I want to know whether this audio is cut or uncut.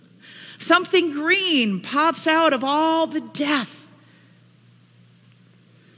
uncut